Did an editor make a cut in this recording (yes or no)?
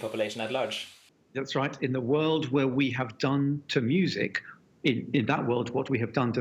no